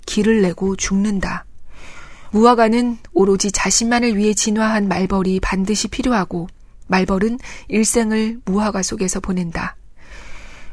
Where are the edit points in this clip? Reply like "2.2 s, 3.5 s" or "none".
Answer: 2.3 s